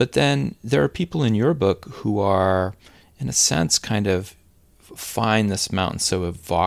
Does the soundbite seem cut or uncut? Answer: uncut